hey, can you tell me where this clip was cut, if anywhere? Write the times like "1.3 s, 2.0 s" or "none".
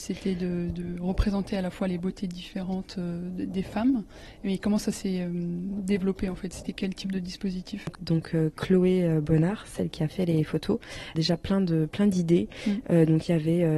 7.9 s, 11.1 s